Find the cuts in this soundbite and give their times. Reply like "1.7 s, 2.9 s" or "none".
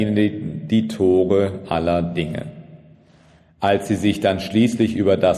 none